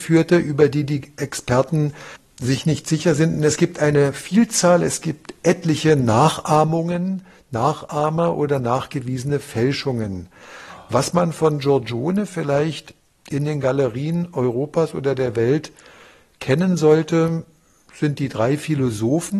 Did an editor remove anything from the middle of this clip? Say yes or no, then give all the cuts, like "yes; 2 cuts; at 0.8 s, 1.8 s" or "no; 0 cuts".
no; 0 cuts